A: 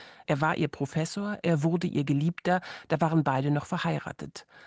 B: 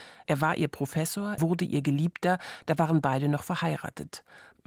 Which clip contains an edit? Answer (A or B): B